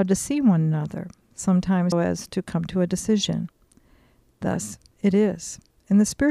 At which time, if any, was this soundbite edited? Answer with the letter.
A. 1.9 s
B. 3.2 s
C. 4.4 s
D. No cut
A